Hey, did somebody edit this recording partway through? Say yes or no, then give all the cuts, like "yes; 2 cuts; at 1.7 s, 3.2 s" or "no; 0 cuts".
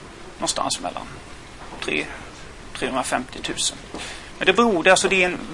no; 0 cuts